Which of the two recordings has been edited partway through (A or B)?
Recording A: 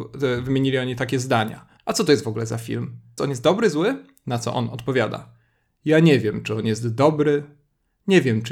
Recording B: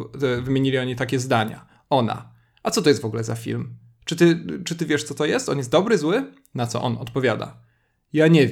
A